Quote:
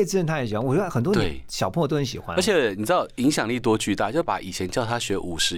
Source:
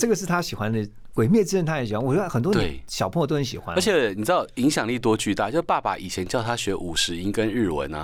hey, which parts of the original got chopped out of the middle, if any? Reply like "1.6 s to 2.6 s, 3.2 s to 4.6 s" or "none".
5.6 s to 5.8 s